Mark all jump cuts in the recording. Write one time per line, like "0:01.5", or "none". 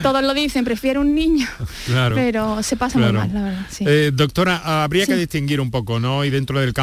none